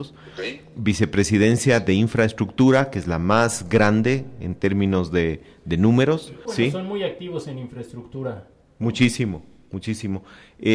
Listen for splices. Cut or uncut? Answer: cut